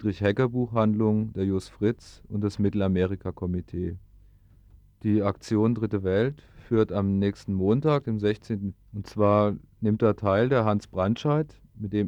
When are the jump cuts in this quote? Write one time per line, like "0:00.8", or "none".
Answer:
0:08.7